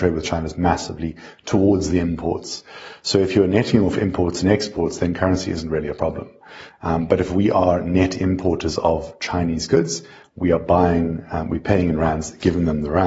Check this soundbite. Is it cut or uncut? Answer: uncut